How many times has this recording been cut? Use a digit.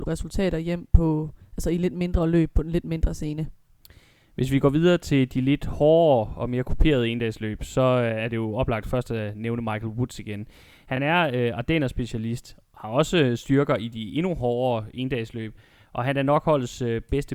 0